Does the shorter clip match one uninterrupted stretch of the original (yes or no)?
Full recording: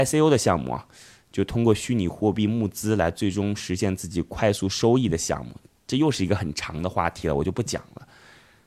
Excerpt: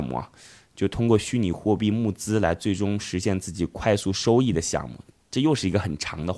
yes